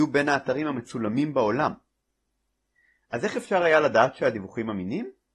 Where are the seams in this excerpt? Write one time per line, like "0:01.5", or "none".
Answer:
0:03.1